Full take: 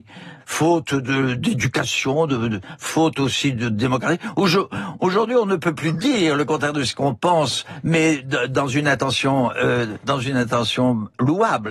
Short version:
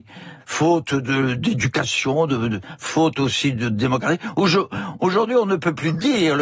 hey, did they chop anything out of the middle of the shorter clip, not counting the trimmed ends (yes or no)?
no